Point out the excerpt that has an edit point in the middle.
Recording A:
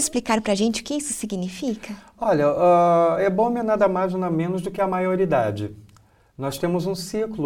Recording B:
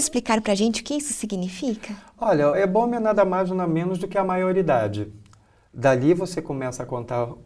B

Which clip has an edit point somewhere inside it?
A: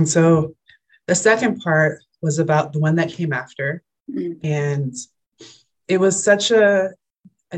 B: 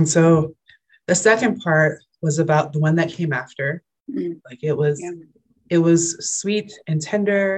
B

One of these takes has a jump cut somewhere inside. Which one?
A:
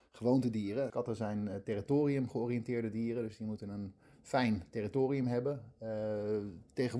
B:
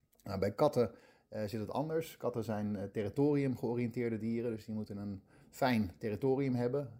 A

